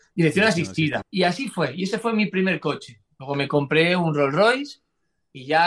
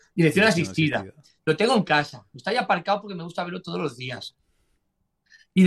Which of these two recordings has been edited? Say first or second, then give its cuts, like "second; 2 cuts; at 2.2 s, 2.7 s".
first; 1 cut; at 1.0 s